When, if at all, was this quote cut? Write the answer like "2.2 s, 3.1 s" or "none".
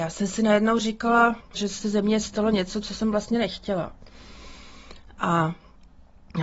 1.5 s